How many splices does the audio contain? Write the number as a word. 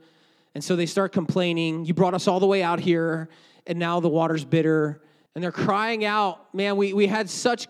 one